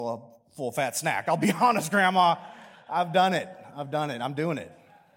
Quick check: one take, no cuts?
yes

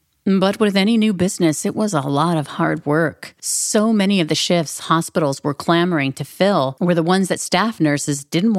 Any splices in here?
yes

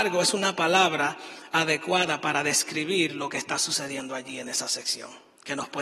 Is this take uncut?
yes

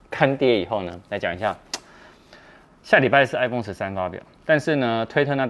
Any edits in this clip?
no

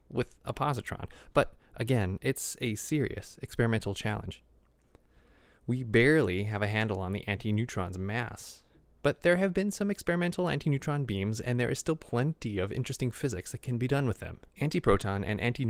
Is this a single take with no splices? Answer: no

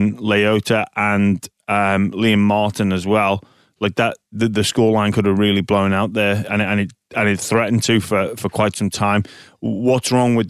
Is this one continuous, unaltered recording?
yes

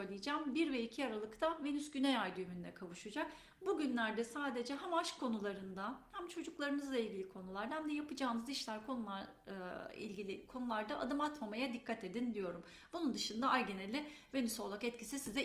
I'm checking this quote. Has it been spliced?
no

